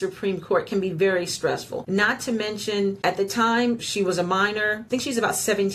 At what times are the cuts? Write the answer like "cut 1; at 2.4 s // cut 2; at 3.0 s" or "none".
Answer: cut 1; at 3.8 s